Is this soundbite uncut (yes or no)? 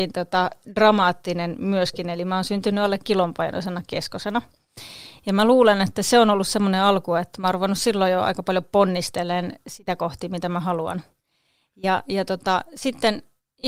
yes